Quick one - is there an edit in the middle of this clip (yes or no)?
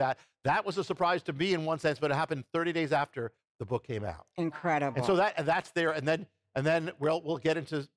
no